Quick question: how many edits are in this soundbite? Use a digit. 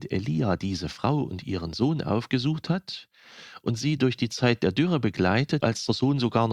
1